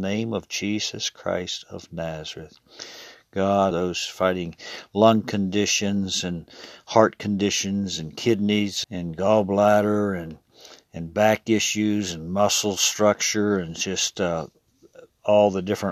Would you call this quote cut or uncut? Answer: cut